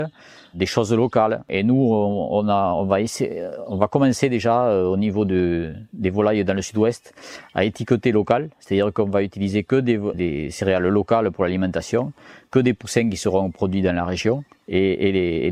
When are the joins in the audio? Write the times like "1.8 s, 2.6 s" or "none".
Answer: 10.1 s